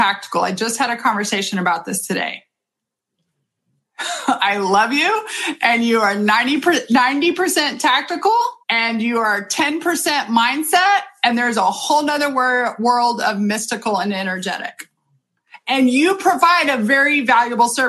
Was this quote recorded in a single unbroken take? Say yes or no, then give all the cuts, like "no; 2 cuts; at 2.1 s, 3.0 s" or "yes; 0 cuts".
no; 1 cut; at 8.6 s